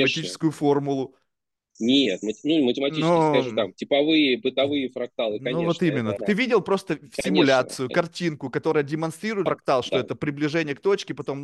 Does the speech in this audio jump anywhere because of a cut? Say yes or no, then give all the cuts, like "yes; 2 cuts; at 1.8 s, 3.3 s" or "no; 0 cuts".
yes; 2 cuts; at 6.2 s, 9.5 s